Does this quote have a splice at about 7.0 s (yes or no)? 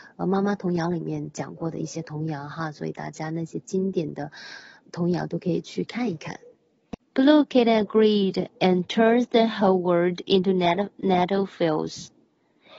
yes